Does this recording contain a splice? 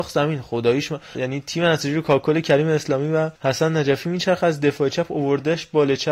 yes; 2 cuts; at 1.1 s, 3.4 s

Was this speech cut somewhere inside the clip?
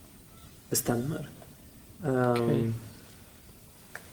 yes; 1 cut; at 1.9 s

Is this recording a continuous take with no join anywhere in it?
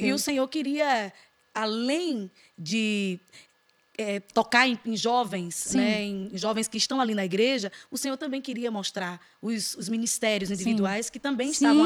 yes; 0 cuts

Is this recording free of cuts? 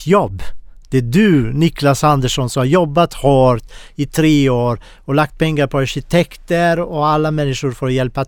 yes; 0 cuts

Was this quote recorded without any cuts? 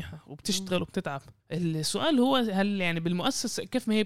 no; 1 cut; at 1.4 s

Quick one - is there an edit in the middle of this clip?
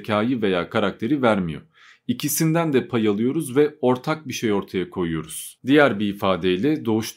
no; 0 cuts

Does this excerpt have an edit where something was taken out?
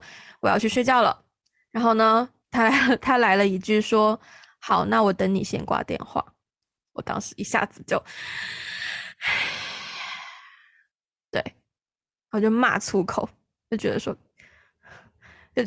no; 0 cuts

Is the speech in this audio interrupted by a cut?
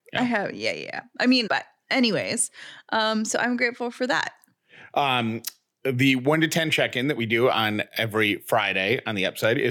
yes; 1 cut; at 1.5 s

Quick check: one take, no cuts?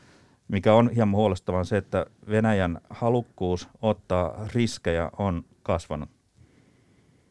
yes; 0 cuts

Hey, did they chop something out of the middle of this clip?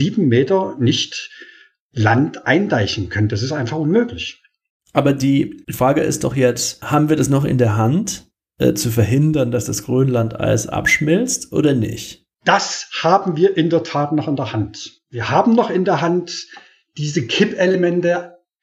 no; 0 cuts

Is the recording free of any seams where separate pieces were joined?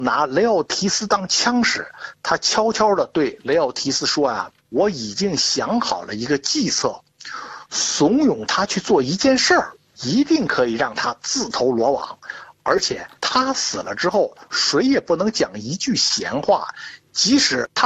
yes; 0 cuts

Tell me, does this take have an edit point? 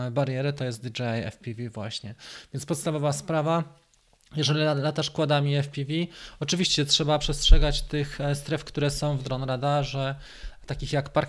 no; 0 cuts

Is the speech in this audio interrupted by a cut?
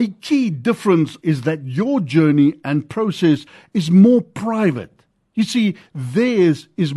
yes; 1 cut; at 1.2 s

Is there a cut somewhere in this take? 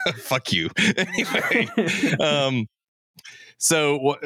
no; 0 cuts

